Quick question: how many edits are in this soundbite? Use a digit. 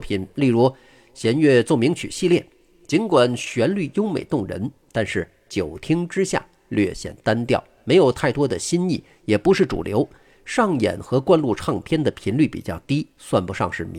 0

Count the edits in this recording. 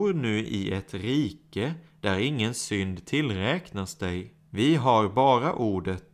1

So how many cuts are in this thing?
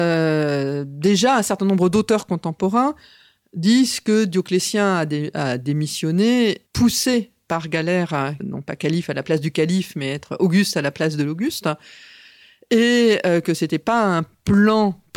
2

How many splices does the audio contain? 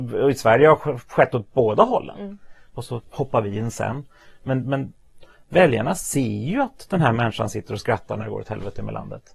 1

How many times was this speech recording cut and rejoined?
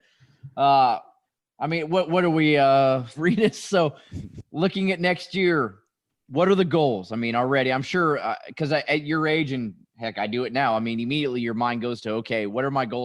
1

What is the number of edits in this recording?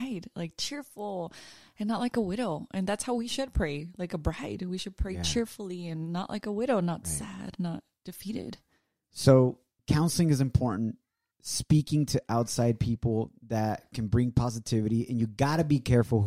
0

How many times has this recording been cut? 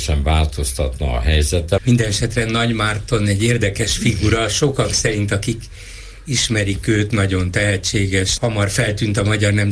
2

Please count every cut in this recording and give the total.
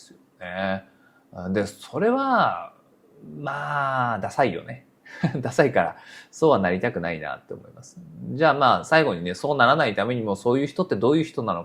0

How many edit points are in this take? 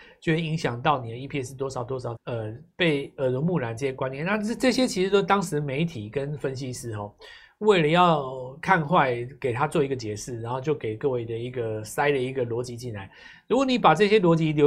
1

